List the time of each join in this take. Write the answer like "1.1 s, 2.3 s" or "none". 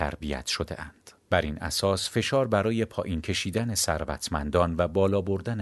1.2 s